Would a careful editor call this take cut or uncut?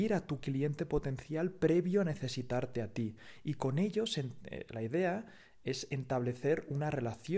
cut